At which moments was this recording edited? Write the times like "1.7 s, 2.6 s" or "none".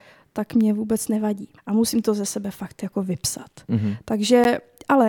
1.6 s